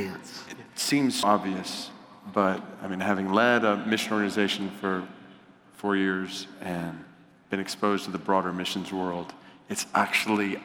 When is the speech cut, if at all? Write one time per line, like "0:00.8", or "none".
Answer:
0:01.2